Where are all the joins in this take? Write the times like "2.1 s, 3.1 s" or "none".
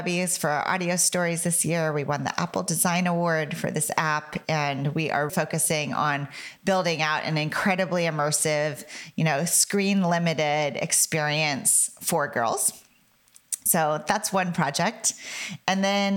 5.3 s